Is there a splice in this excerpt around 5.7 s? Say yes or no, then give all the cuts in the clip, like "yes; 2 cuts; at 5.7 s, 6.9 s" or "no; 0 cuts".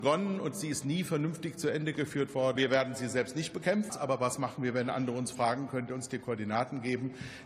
no; 2 cuts; at 2.6 s, 3.9 s